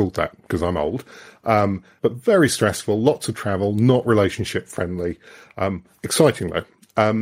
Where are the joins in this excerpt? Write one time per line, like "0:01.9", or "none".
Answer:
0:02.0